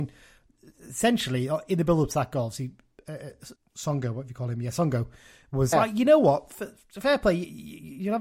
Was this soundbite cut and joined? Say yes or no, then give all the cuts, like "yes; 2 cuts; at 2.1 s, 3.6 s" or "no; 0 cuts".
yes; 2 cuts; at 3.6 s, 5.7 s